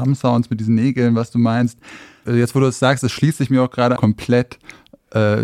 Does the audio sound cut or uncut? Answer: cut